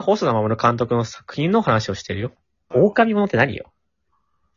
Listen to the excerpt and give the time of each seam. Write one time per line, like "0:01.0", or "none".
0:02.7